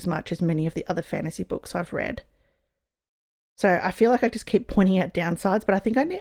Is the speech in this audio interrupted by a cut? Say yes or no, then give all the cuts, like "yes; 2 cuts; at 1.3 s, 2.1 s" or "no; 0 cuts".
no; 0 cuts